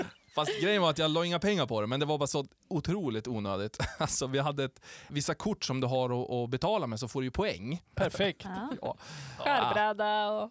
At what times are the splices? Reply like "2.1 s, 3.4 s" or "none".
5.1 s, 8.0 s